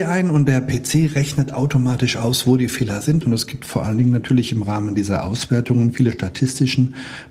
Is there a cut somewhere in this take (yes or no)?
yes